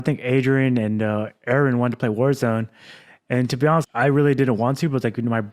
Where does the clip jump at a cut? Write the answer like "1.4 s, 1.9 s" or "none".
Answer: 3.8 s